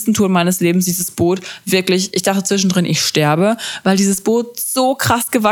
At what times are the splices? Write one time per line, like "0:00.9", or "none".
none